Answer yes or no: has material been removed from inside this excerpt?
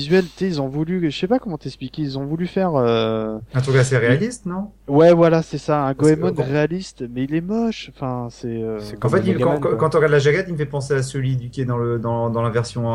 no